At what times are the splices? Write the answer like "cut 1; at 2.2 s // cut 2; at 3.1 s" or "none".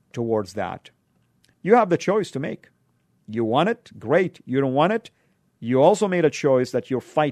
cut 1; at 1.5 s